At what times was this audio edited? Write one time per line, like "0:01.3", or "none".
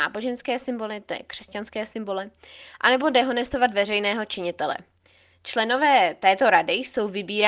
none